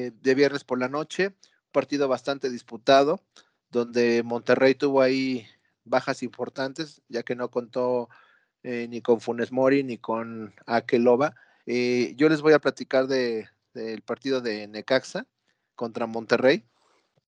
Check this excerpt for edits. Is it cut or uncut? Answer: cut